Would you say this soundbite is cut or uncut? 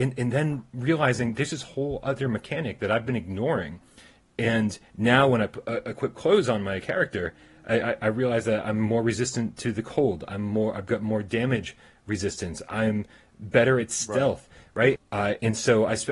cut